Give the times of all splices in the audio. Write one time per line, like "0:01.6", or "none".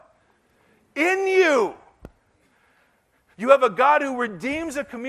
0:03.3